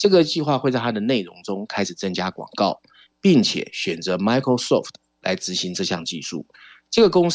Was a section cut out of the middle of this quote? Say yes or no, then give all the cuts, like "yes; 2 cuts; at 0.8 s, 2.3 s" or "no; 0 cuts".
no; 0 cuts